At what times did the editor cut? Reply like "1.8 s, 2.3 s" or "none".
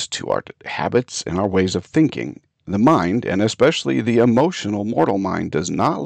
none